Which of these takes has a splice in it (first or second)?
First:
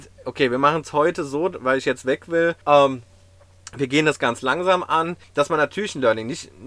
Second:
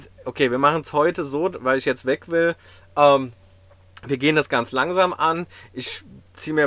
first